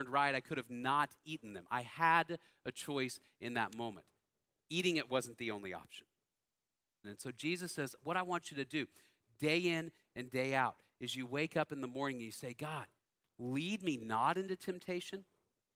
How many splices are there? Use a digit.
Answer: 1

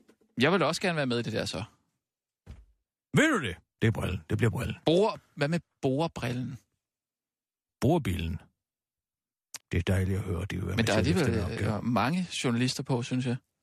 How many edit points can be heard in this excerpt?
3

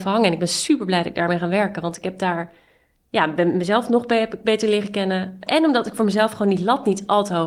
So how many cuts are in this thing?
1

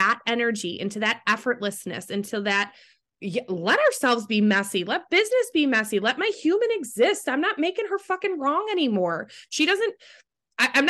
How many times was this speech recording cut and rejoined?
0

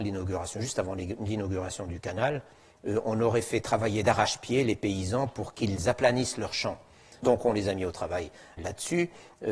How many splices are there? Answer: 2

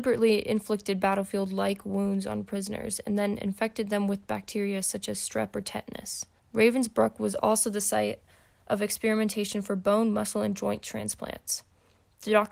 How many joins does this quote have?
1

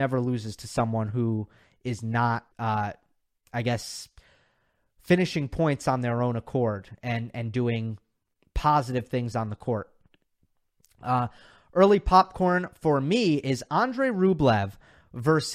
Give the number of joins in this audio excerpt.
1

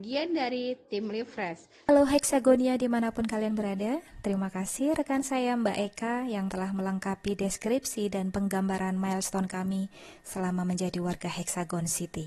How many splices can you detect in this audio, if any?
1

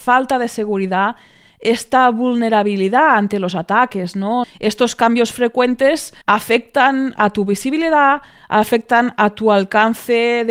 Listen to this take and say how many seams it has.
2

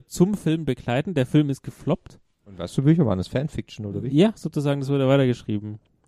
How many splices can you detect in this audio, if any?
0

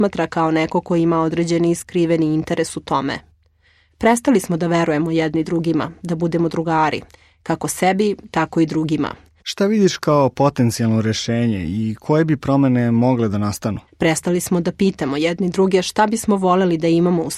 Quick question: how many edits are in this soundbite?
2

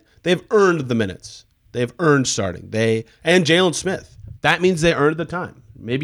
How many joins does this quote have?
1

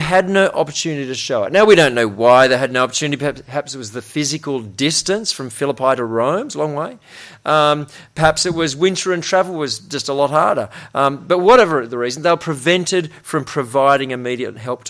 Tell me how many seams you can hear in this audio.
0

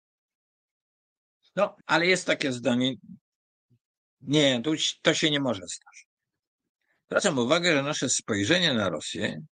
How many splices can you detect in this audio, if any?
1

